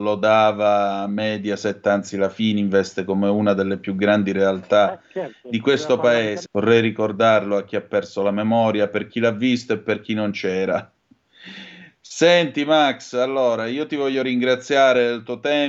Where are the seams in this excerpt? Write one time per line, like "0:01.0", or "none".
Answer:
0:06.4